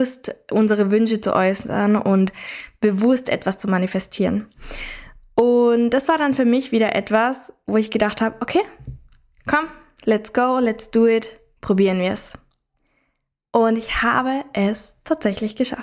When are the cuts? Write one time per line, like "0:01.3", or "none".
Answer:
none